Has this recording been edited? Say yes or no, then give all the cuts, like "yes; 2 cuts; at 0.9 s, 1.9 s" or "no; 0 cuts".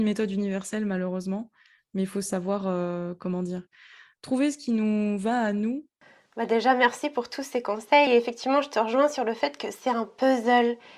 no; 0 cuts